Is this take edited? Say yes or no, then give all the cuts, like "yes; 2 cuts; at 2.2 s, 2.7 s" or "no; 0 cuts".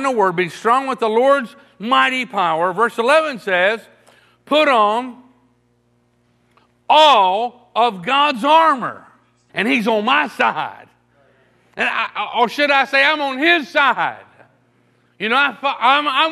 yes; 1 cut; at 9.5 s